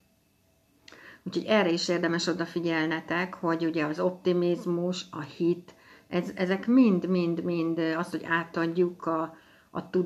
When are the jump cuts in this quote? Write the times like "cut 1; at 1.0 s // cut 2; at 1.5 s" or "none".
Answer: none